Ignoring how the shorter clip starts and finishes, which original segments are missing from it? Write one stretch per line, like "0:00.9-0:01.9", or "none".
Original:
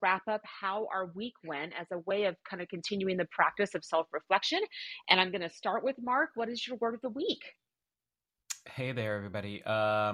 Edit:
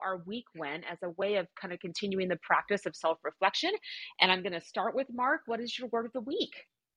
none